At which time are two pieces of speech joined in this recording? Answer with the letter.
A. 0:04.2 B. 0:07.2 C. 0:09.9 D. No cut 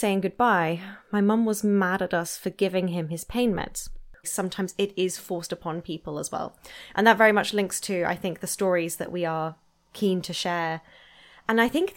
A